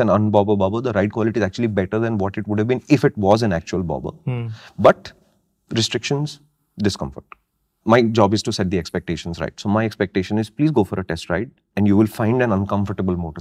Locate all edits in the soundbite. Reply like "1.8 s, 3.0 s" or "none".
7.8 s